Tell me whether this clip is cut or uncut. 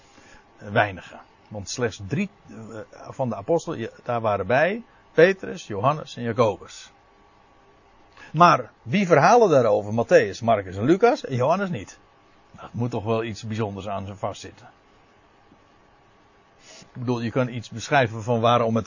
cut